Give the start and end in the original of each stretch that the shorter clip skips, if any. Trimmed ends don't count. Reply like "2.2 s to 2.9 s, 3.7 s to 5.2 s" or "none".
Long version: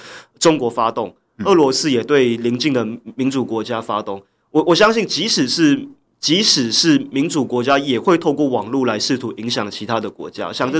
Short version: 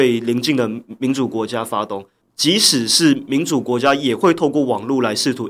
4.4 s to 6.0 s